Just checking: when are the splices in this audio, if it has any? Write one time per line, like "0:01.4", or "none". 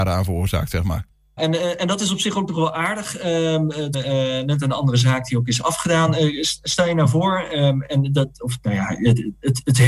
0:01.4
0:03.9